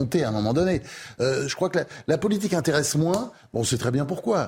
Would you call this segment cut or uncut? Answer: uncut